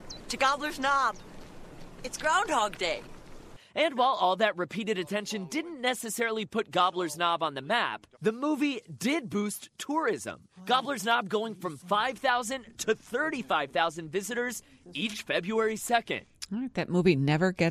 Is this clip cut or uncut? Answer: cut